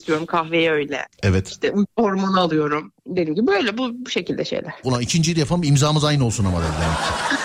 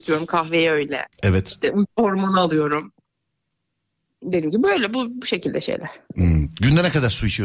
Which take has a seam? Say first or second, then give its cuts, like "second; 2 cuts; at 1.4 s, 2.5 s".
first; 2 cuts; at 3.0 s, 4.8 s